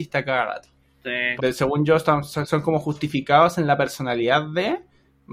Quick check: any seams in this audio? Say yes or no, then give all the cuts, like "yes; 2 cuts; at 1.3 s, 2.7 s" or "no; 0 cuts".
yes; 1 cut; at 1.4 s